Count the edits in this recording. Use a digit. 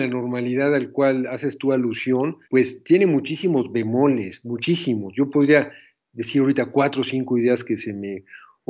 1